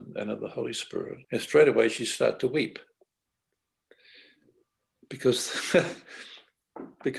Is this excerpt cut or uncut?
cut